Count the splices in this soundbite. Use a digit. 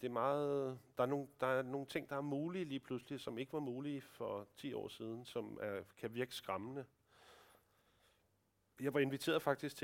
0